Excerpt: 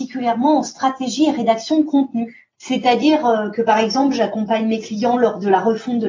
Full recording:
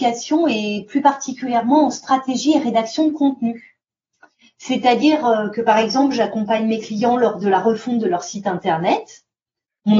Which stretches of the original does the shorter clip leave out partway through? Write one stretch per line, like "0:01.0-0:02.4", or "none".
0:03.8-0:04.5